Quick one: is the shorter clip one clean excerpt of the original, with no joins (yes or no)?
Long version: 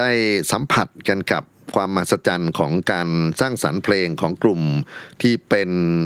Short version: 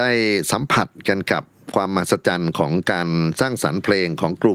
yes